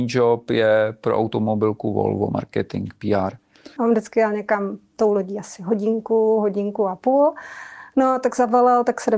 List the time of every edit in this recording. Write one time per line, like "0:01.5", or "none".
0:03.8